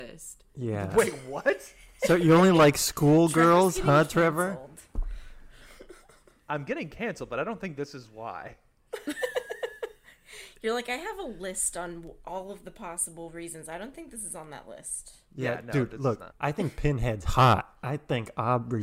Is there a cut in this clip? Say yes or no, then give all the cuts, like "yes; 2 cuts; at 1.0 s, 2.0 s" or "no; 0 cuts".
yes; 1 cut; at 16.3 s